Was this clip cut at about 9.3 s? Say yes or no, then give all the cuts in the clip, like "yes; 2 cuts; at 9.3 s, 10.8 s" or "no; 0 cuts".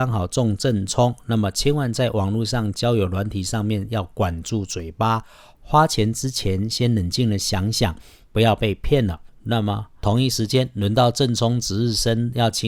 yes; 1 cut; at 9.3 s